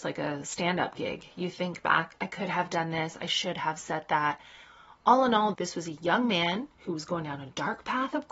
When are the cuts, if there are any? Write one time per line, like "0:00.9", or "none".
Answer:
0:05.5
0:06.7